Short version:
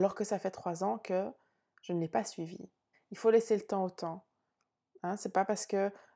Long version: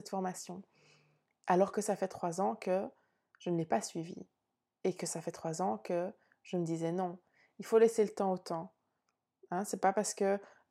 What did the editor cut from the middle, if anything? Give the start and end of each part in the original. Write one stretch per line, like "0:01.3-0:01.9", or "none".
0:04.5-0:07.4